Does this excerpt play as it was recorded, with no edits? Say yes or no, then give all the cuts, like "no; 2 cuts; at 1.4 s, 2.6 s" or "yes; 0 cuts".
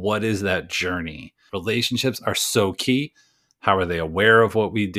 no; 2 cuts; at 1.5 s, 3.5 s